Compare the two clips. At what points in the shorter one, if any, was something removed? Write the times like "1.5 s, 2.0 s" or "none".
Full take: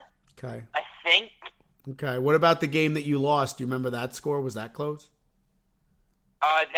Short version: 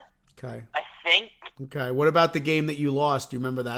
1.5 s